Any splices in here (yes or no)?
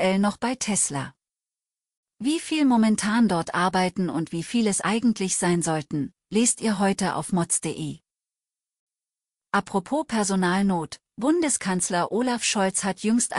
no